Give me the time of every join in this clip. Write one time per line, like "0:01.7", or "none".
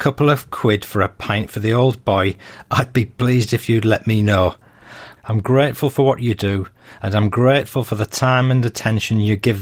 0:05.2